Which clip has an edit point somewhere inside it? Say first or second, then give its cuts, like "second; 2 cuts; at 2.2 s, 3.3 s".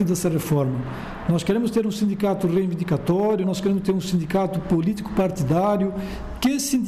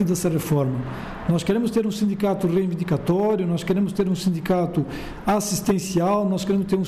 first; 1 cut; at 3.4 s